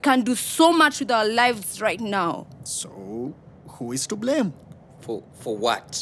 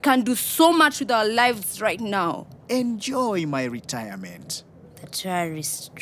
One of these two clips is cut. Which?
second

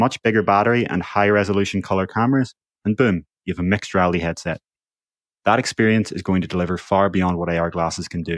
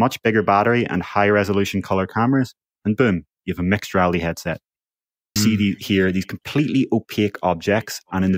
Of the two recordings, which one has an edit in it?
second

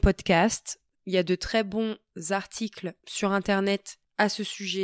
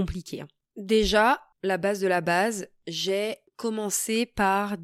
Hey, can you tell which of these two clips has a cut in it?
first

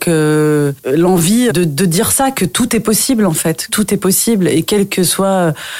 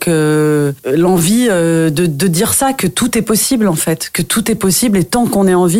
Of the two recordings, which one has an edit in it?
first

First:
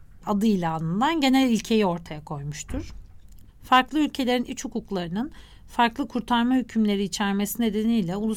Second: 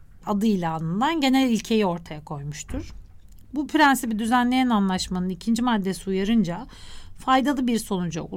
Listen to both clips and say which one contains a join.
first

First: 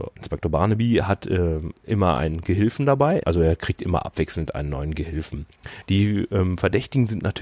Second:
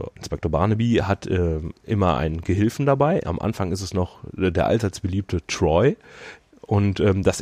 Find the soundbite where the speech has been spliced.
first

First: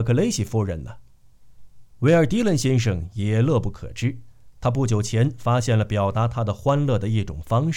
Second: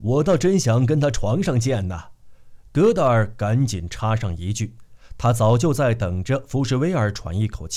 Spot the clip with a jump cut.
first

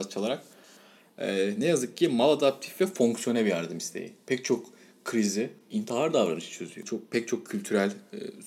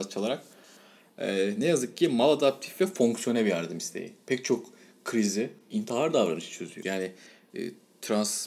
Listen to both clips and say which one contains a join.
second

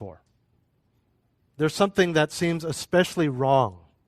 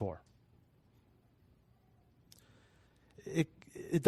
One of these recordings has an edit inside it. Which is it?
first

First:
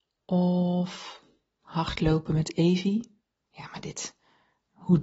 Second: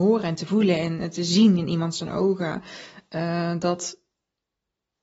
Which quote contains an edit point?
first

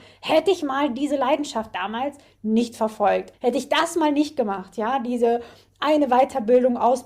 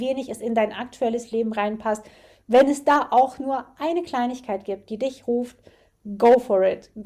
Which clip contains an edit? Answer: first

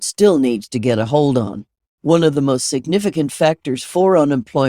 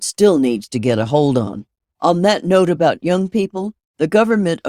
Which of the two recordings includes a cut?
first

